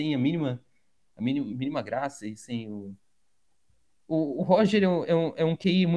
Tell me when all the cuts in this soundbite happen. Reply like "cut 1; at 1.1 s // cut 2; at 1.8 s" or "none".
none